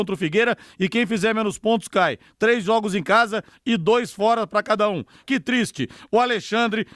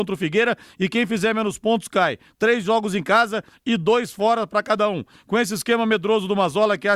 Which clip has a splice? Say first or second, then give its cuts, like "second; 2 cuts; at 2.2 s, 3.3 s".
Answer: first; 1 cut; at 5.2 s